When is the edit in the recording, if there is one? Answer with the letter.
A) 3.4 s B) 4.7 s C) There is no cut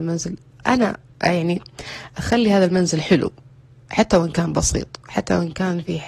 C